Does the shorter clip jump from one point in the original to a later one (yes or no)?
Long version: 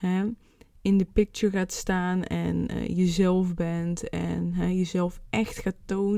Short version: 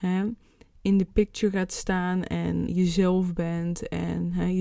yes